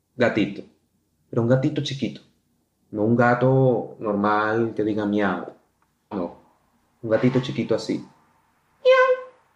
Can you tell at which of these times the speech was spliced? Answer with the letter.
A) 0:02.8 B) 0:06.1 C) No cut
B